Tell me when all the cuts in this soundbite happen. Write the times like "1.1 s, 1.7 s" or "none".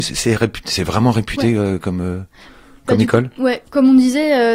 none